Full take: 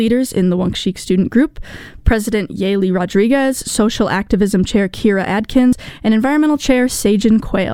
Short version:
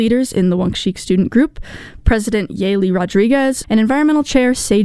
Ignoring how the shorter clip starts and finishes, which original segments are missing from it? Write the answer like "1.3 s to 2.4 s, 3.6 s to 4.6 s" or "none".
3.6 s to 6.0 s

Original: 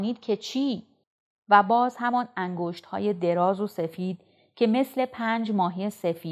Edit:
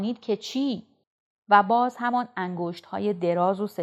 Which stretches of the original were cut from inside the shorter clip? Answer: none

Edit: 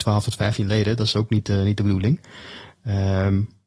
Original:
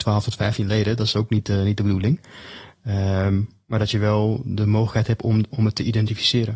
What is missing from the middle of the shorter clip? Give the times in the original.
none

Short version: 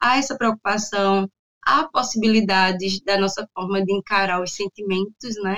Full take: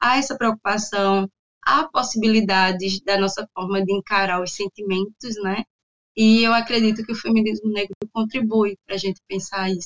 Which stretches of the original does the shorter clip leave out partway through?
none

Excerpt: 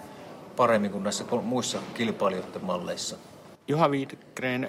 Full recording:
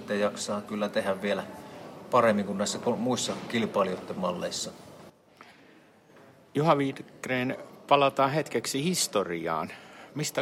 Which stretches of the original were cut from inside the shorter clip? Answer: 5.1 s to 6.5 s

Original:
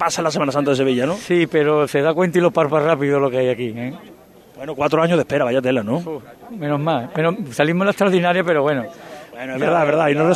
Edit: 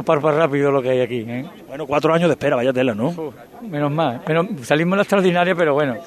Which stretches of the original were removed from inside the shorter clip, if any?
4.2 s to 4.6 s

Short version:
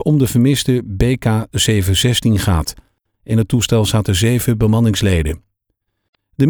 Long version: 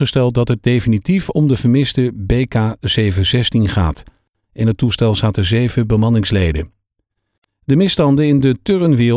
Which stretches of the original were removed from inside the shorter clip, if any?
none

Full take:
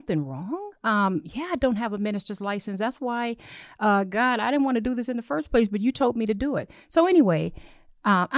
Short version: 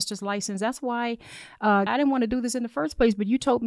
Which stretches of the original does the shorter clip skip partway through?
4.1 s to 4.4 s

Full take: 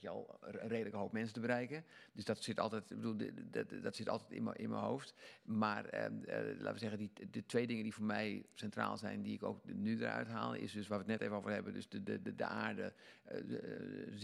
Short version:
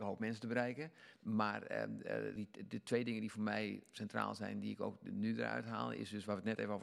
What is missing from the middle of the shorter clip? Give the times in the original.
2.1 s to 5.4 s, 6.6 s to 7.0 s

